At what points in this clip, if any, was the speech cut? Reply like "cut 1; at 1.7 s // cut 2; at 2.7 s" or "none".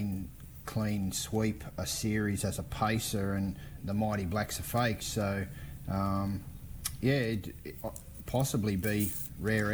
cut 1; at 3.8 s // cut 2; at 5.0 s